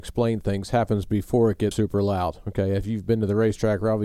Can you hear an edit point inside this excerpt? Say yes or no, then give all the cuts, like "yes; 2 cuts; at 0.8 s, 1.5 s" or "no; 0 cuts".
yes; 1 cut; at 1.7 s